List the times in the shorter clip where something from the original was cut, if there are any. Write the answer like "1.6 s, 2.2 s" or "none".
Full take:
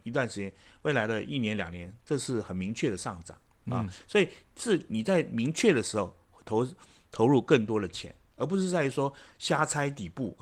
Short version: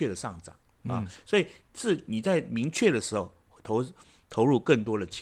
none